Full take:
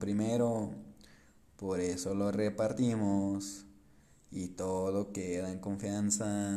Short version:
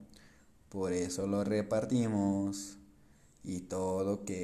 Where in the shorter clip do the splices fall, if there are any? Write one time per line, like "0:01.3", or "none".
none